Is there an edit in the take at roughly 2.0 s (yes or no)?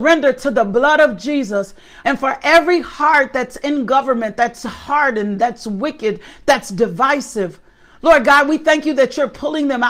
yes